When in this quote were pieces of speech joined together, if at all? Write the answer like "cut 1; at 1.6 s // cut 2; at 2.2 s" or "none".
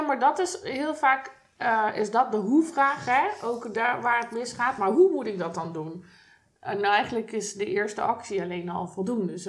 none

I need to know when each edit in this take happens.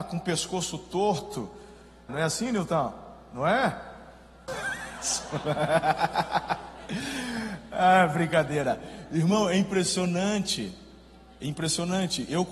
cut 1; at 2.1 s // cut 2; at 4.5 s

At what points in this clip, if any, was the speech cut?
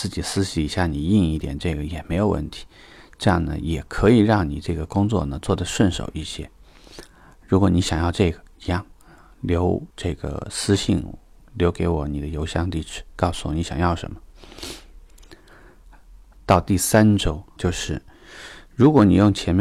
cut 1; at 9.9 s // cut 2; at 16.3 s // cut 3; at 17.6 s

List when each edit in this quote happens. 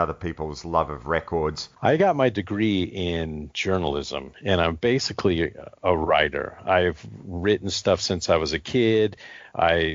none

